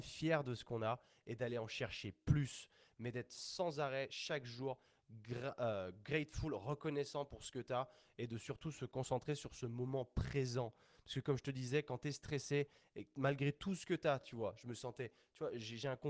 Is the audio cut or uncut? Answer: uncut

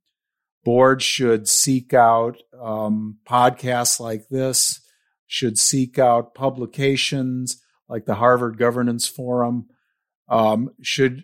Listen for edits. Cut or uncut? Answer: uncut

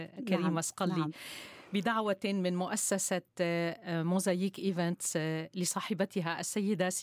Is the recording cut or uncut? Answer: uncut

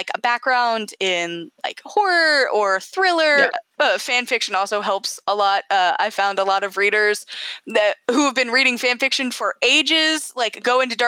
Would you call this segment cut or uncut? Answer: cut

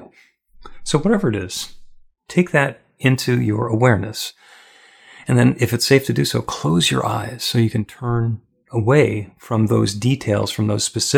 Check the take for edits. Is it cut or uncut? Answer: uncut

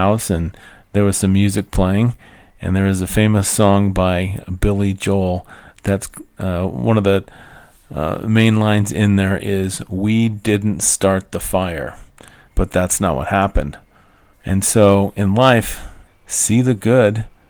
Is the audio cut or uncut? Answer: cut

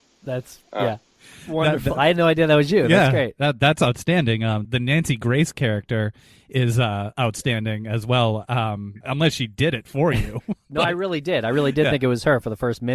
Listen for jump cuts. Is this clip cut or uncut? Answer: cut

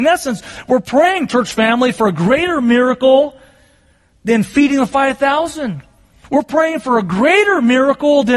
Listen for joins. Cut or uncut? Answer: uncut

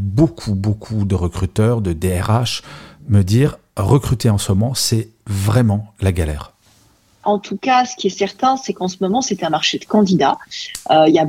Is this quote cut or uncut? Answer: cut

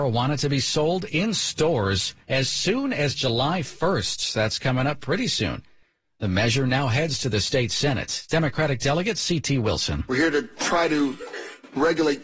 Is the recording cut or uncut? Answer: uncut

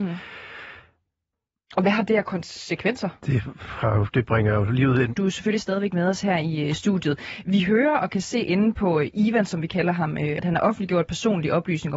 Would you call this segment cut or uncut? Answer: cut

